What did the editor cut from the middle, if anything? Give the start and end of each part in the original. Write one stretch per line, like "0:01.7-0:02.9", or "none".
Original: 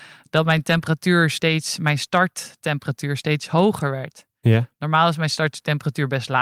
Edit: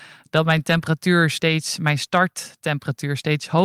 none